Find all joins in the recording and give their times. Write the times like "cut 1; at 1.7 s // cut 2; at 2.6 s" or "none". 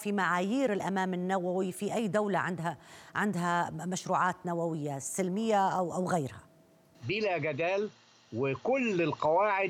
none